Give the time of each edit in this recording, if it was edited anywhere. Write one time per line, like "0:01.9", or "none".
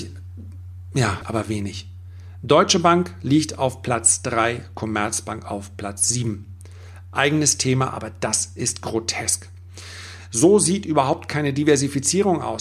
0:01.2

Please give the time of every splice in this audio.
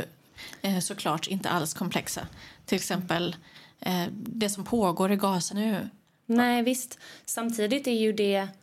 0:05.5

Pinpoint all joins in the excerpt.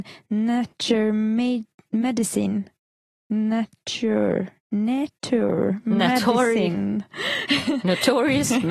0:05.2

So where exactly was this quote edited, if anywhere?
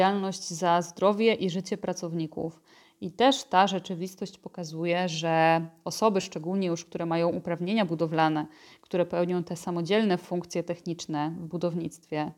none

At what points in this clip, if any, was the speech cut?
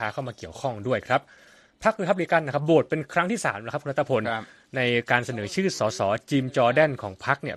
none

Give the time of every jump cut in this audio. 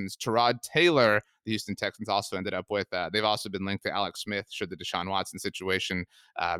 none

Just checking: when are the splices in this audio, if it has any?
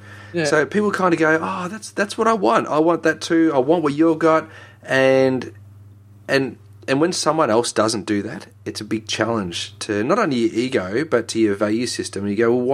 none

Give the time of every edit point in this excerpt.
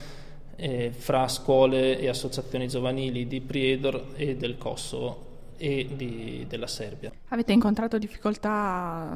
none

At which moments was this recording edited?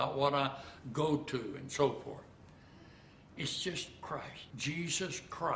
0:03.3
0:04.5

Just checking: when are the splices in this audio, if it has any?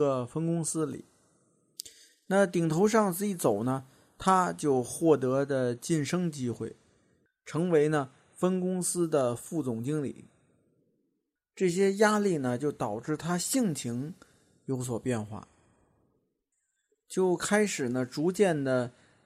0:11.4

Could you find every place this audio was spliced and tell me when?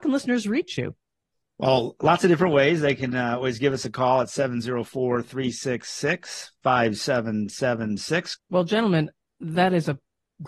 0:08.4

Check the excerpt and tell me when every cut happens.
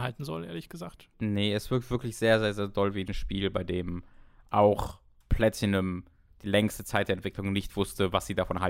0:01.1

